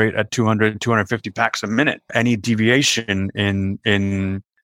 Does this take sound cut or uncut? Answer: uncut